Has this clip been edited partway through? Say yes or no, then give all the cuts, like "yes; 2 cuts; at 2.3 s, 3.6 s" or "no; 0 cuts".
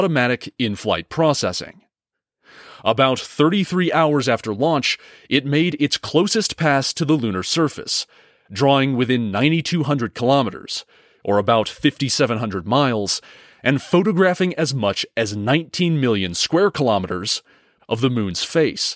yes; 1 cut; at 17.8 s